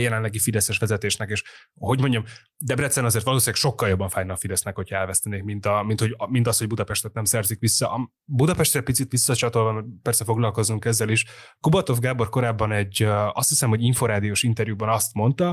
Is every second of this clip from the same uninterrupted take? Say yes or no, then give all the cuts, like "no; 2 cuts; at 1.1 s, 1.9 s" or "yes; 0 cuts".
yes; 0 cuts